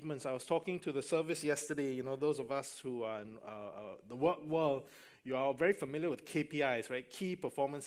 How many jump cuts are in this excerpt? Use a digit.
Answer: 0